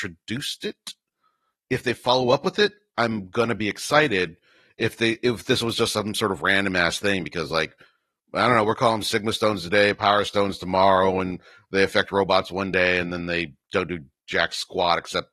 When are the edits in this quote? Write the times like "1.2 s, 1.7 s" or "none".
none